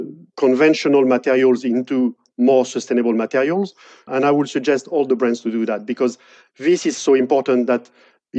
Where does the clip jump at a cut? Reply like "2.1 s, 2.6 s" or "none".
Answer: 4.1 s